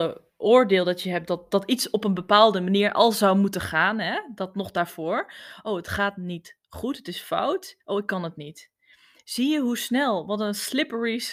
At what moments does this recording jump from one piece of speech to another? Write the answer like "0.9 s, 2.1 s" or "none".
none